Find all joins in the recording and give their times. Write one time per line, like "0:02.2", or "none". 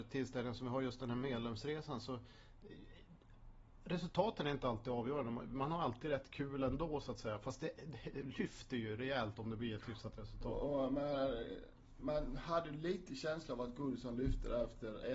none